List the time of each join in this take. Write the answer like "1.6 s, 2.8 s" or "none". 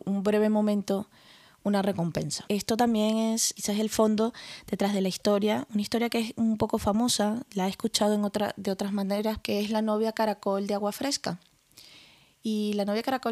9.4 s

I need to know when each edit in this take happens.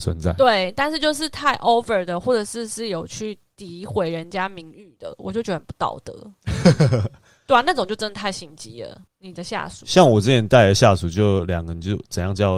9.1 s

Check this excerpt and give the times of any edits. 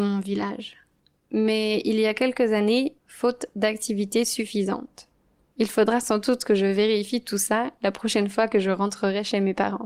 3.0 s, 5.5 s

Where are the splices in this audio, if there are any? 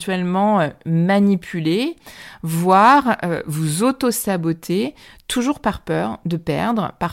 none

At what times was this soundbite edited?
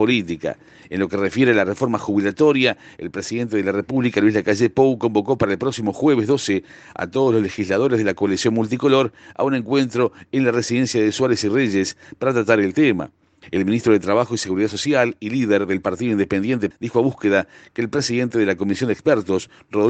13.4 s, 16.7 s

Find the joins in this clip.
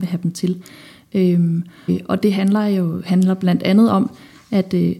1.9 s

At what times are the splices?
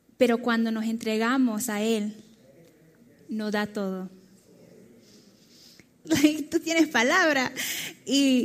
6.0 s

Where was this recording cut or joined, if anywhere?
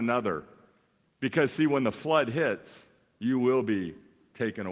3.2 s

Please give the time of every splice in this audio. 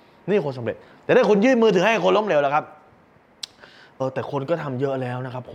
4.0 s

